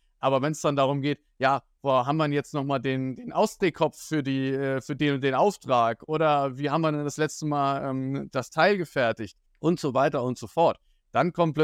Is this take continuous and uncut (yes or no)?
no